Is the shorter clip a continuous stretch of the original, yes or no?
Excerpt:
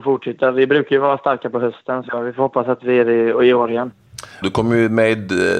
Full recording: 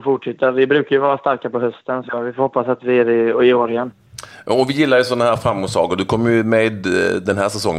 no